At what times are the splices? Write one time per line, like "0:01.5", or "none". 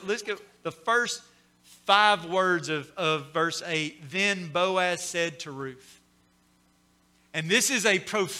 none